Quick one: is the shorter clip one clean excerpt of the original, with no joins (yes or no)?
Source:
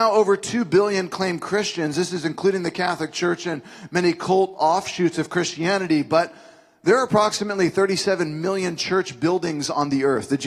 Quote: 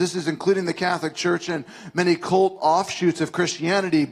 yes